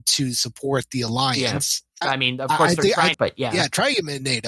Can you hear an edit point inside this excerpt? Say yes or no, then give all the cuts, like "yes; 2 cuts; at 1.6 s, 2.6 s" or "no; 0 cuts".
yes; 2 cuts; at 2.0 s, 3.1 s